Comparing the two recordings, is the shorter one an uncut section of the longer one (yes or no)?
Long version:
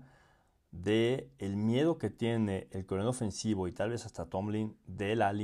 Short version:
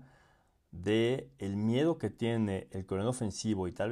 yes